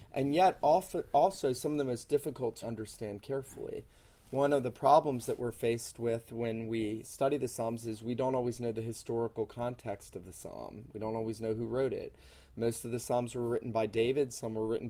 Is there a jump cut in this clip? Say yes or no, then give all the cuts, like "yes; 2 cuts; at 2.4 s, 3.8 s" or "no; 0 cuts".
yes; 1 cut; at 2.6 s